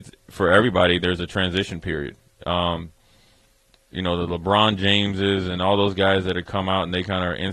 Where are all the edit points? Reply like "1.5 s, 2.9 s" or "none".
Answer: none